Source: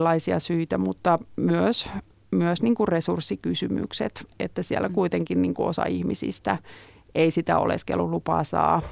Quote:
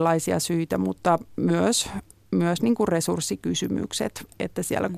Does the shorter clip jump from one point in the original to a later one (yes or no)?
no